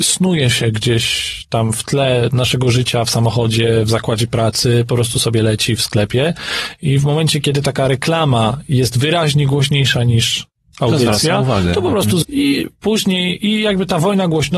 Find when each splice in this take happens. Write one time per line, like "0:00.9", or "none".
0:12.2

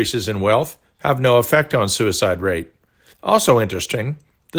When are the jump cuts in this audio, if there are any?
0:03.1

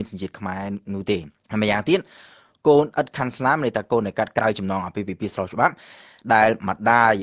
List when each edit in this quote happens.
0:01.4

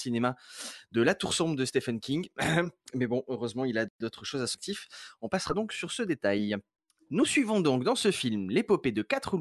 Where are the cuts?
none

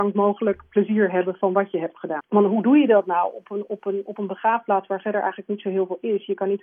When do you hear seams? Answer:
0:02.2

